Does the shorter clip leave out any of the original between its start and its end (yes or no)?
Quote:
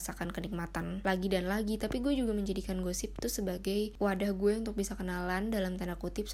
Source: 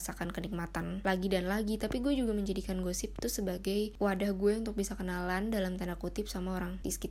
no